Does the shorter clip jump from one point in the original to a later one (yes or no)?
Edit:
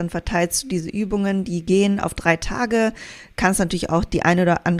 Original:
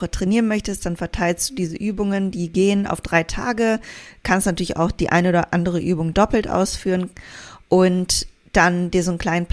no